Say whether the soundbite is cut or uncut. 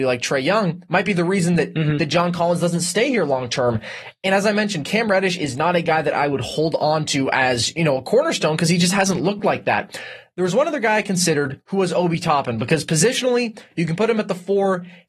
uncut